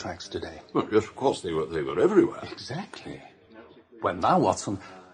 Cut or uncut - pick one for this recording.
uncut